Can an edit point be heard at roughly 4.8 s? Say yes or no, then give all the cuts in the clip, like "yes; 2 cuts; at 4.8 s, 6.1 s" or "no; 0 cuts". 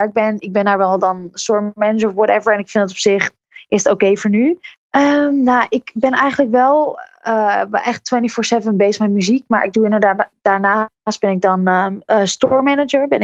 yes; 1 cut; at 4.8 s